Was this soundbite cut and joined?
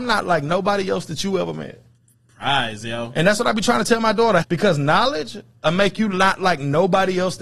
yes; 1 cut; at 4.4 s

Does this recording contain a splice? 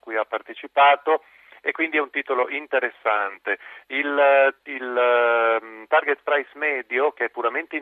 no; 0 cuts

